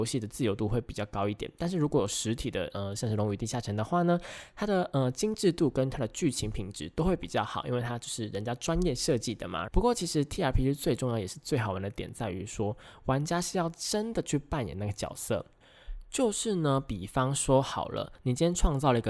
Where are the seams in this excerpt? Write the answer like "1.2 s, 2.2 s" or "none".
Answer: 9.7 s